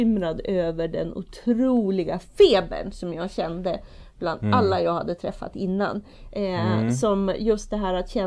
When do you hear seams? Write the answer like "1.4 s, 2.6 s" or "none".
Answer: none